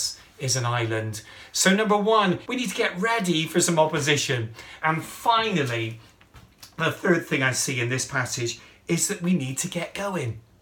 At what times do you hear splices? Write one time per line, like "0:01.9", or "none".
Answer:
0:02.5
0:04.8